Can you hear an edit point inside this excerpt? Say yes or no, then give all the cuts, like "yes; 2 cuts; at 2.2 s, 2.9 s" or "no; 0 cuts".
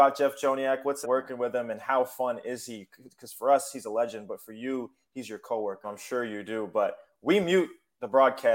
yes; 2 cuts; at 1.0 s, 5.8 s